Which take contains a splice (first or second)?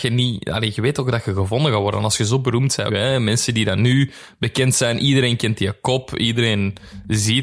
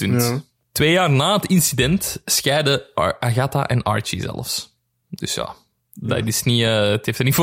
first